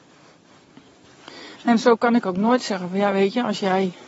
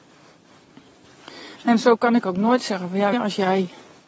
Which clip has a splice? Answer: second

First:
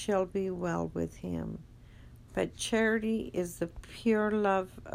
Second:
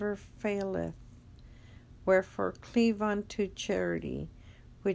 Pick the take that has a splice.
first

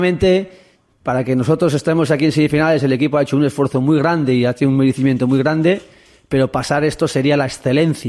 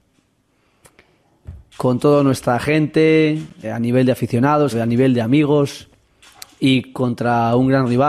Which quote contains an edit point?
second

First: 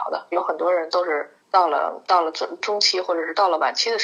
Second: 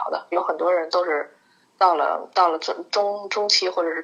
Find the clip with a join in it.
first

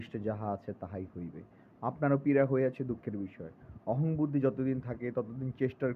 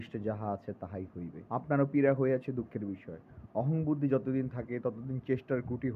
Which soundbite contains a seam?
second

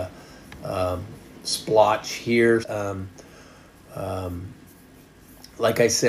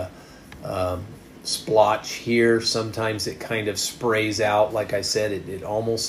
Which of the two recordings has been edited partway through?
first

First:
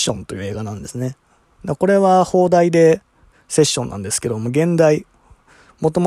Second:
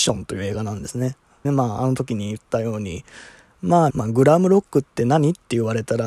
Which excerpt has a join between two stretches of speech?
second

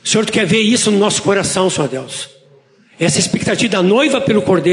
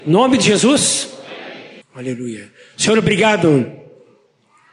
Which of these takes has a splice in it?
second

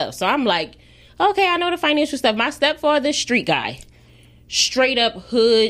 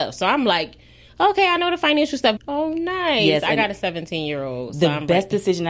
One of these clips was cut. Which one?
second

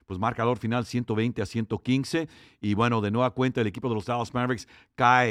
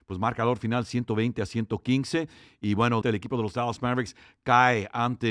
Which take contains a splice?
second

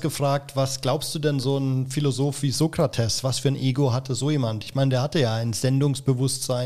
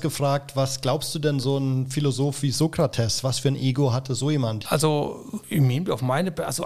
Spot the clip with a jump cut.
second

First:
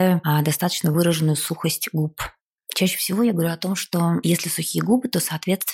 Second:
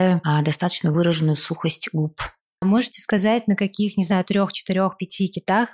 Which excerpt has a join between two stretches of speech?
second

